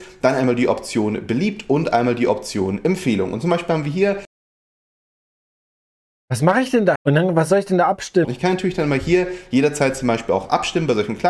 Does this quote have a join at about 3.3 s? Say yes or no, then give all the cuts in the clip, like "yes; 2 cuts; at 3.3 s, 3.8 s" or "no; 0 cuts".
no; 2 cuts; at 6.9 s, 8.2 s